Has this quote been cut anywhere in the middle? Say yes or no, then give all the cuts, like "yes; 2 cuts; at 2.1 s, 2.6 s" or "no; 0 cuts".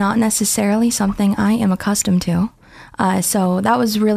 no; 0 cuts